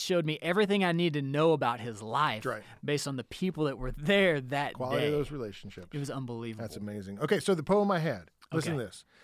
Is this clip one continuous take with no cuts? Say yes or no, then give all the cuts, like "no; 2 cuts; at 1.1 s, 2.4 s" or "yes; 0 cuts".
yes; 0 cuts